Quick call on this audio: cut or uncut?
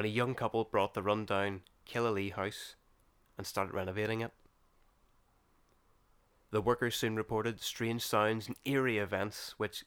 uncut